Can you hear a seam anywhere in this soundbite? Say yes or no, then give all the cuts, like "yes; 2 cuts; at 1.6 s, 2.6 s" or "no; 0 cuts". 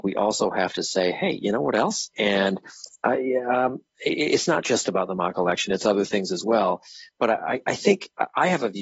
yes; 1 cut; at 2.1 s